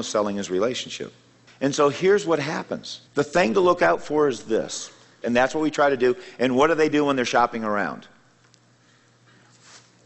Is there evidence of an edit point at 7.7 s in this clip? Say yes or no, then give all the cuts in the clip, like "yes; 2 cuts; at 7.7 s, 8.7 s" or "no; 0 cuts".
no; 3 cuts; at 1.5 s, 3.1 s, 5.2 s